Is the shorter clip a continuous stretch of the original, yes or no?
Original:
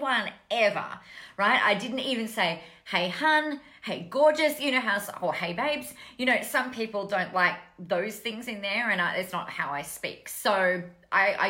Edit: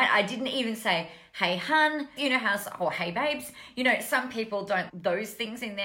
no